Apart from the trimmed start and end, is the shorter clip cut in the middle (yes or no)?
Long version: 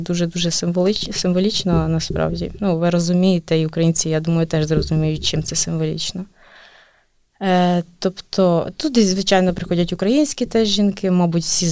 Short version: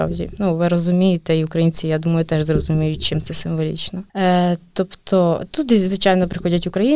yes